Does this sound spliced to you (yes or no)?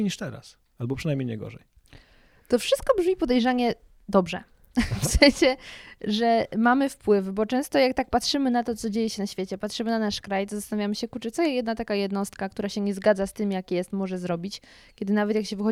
no